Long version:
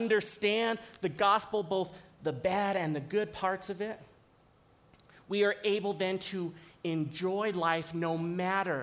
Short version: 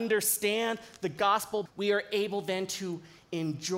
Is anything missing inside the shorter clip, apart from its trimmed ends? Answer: yes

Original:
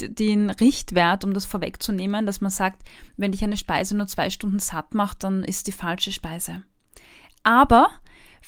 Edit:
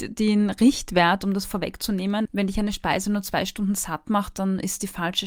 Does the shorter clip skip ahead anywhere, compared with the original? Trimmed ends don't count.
yes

